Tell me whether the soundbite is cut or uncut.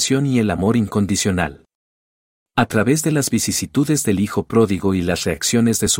uncut